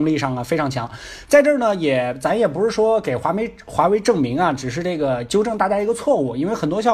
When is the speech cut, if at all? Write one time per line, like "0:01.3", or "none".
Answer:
none